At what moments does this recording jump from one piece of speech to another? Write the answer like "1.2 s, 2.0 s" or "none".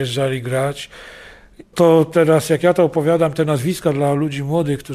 1.7 s